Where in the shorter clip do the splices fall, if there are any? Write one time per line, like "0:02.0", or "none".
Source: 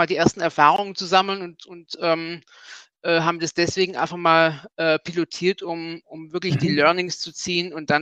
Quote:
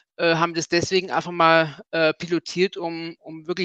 none